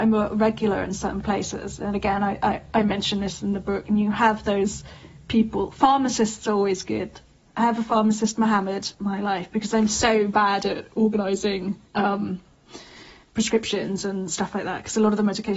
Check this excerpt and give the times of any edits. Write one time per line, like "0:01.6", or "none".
0:08.9
0:11.9